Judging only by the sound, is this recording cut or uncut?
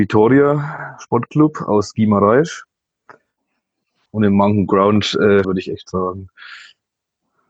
cut